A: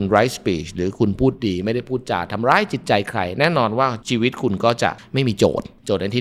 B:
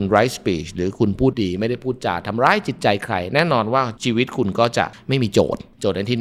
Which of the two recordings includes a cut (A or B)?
B